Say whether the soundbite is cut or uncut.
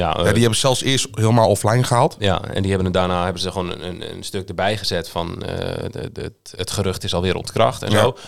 uncut